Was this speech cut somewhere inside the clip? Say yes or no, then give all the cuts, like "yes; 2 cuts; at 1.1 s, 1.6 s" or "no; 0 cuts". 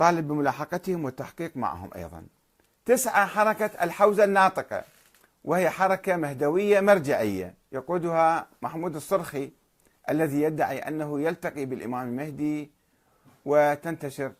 no; 0 cuts